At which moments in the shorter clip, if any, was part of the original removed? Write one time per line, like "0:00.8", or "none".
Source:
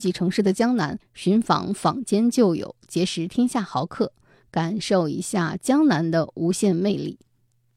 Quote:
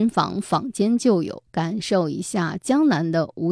0:01.5